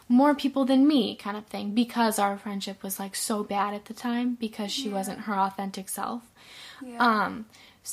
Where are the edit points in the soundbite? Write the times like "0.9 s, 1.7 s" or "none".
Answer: none